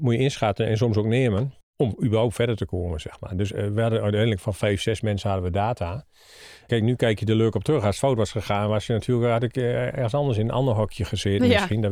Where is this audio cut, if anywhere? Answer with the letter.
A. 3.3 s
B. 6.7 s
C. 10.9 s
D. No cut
B